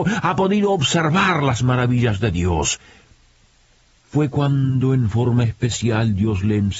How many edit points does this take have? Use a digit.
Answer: 1